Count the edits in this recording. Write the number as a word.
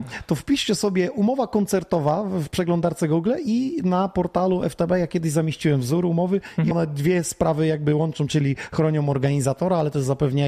one